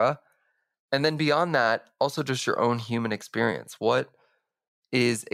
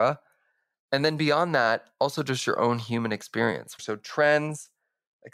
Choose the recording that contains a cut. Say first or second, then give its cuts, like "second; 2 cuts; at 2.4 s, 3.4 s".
second; 1 cut; at 3.8 s